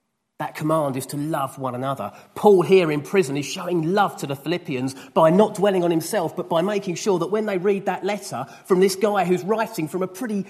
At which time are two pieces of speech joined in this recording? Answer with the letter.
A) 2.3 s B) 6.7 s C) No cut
C